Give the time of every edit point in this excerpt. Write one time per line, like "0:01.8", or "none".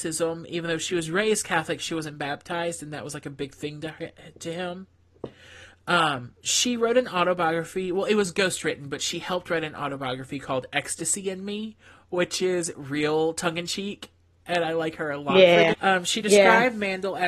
0:15.7